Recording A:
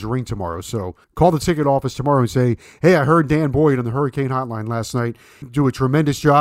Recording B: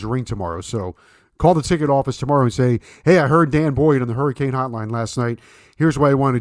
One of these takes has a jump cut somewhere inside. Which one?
A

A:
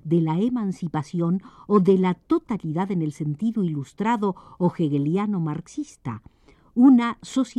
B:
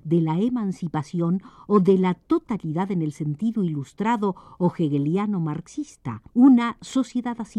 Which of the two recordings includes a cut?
B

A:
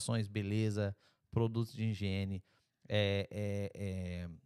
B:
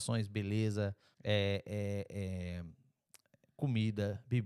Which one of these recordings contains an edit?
B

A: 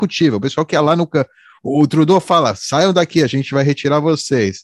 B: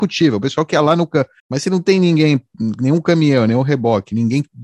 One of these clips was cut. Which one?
B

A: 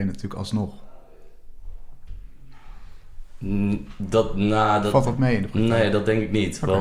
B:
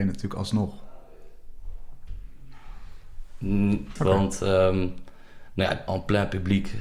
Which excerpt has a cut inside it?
B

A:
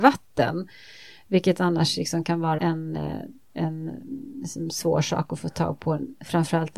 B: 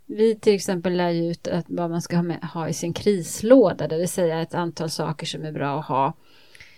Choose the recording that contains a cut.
A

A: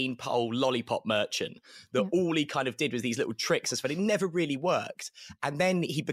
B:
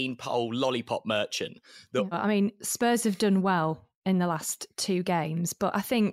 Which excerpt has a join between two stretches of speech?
B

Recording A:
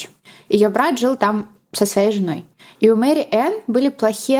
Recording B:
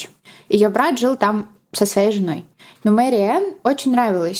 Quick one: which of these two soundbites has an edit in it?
B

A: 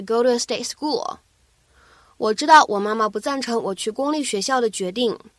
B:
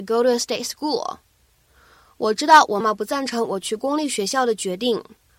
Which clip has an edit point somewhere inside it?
B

